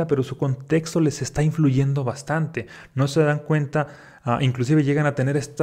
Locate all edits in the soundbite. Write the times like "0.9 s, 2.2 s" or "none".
none